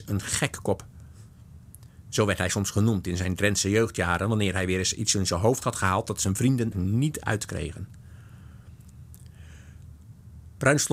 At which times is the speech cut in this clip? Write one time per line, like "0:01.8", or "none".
0:06.7